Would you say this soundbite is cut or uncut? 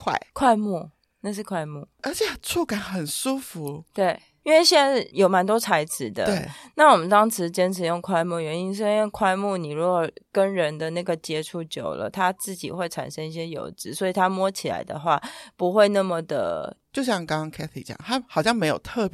cut